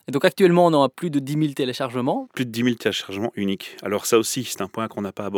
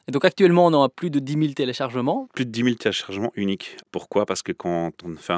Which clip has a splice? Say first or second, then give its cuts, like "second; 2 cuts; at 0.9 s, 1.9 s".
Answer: second; 1 cut; at 3.8 s